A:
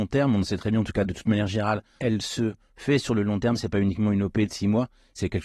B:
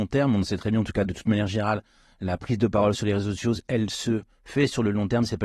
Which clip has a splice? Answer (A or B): A